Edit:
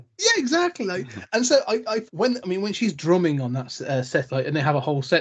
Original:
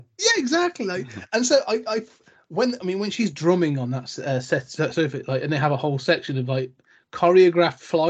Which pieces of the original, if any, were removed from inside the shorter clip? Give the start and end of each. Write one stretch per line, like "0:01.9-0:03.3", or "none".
0:02.1-0:02.5
0:04.7-0:05.3